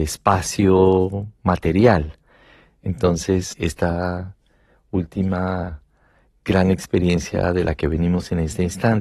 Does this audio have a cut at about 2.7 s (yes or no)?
no